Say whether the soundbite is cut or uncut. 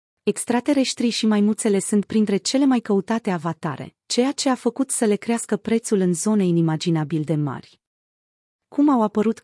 uncut